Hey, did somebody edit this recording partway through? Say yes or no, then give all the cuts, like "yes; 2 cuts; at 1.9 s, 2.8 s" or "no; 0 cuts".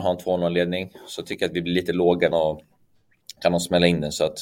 yes; 1 cut; at 2.3 s